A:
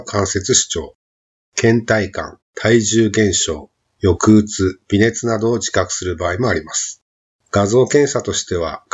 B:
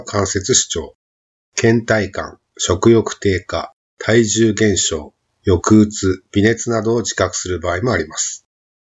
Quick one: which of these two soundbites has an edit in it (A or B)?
A